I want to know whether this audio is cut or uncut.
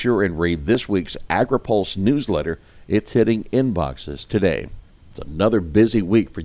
cut